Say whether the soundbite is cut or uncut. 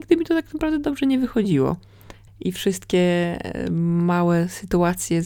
cut